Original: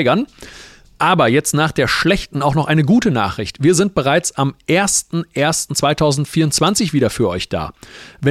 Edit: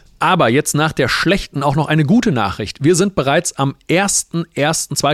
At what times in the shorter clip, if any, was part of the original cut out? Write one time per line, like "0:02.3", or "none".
none